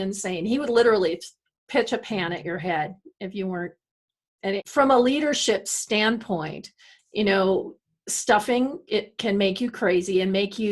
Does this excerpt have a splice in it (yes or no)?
yes